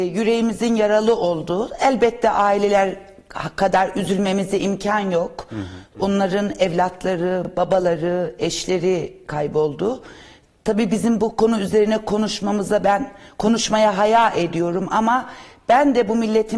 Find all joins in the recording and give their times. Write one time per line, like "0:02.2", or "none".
none